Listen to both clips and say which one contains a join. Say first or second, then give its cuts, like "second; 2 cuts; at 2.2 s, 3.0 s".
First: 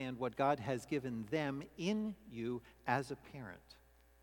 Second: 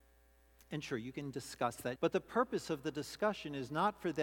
second; 1 cut; at 2.0 s